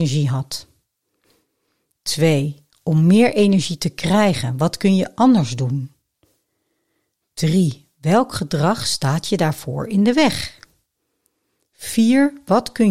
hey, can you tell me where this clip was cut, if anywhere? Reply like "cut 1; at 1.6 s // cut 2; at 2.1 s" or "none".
none